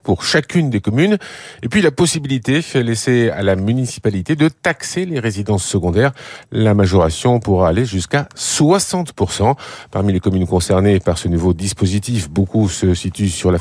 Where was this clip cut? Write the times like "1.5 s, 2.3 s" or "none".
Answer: none